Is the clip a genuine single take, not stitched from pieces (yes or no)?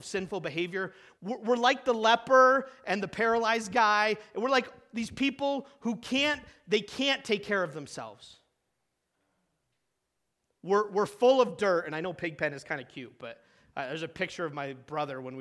no